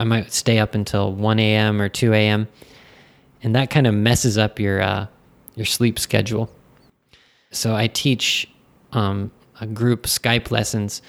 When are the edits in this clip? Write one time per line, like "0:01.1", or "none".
0:07.5
0:09.4